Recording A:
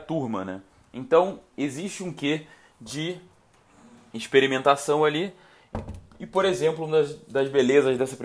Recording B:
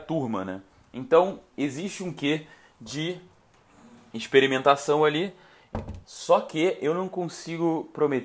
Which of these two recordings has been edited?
B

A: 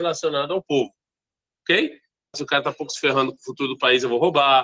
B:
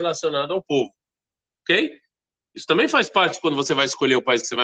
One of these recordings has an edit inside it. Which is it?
A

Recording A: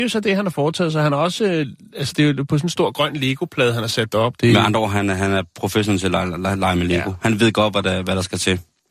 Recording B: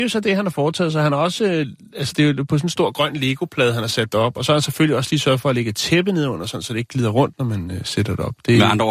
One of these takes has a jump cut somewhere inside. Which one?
A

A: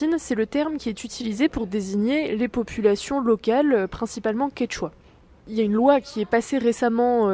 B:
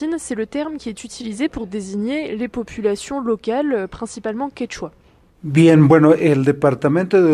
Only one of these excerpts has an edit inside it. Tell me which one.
B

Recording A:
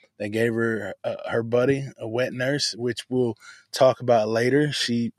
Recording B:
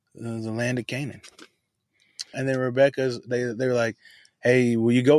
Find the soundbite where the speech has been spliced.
B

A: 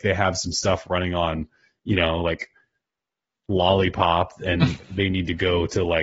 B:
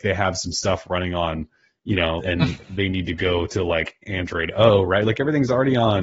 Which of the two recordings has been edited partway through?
B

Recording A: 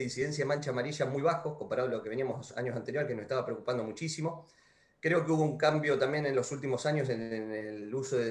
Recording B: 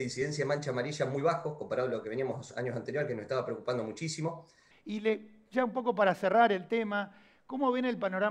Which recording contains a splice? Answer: B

